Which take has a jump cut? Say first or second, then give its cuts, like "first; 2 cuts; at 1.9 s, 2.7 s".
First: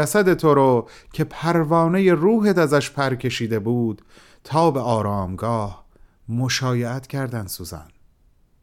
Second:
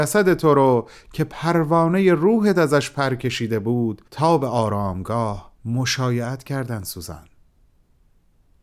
second; 2 cuts; at 4.1 s, 5.6 s